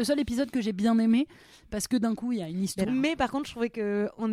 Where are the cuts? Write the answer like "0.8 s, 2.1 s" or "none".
2.9 s